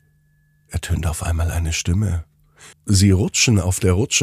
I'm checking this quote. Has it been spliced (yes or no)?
yes